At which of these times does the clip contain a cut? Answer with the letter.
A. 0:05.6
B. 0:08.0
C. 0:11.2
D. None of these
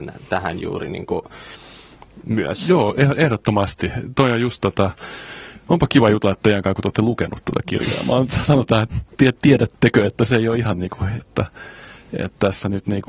C